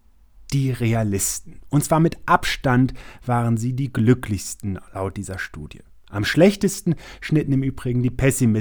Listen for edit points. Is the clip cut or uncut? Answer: uncut